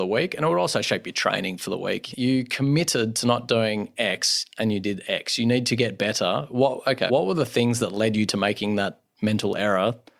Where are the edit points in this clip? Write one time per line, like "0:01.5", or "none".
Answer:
0:02.1
0:07.1